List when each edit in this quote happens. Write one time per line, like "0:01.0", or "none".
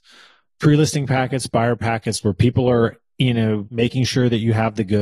0:03.7